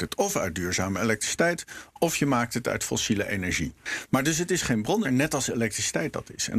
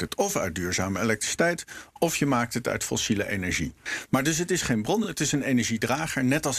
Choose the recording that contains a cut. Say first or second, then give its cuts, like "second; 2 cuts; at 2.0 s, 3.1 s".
first; 1 cut; at 5.0 s